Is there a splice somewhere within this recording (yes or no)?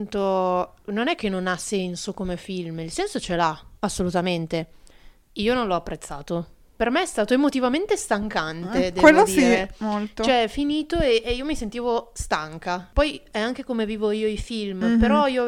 yes